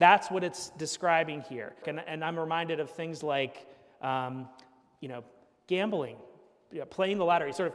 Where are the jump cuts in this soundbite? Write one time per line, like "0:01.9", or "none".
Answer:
0:01.8

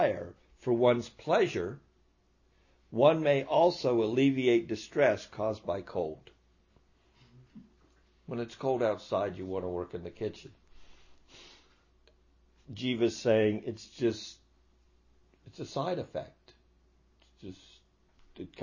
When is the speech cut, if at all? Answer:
none

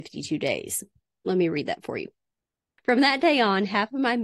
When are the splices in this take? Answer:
0:01.2

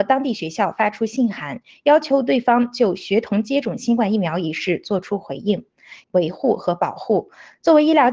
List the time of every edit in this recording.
0:06.0

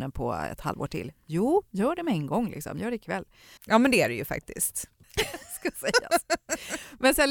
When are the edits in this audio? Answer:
0:03.6
0:05.0

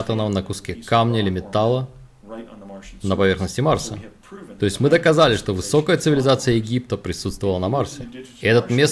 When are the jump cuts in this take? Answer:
none

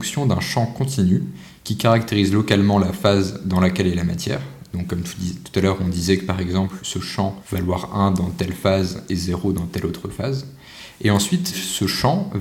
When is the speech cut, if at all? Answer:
none

